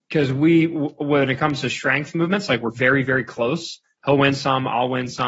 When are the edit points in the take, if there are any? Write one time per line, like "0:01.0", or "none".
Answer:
none